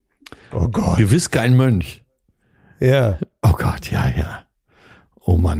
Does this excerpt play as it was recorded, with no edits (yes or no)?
yes